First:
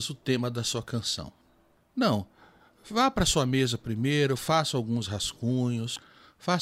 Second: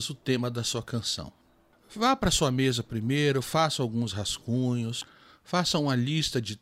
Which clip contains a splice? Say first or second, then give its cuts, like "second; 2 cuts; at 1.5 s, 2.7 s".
second; 1 cut; at 1.7 s